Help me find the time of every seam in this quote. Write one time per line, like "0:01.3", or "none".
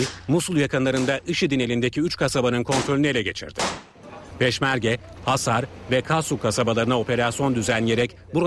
0:05.2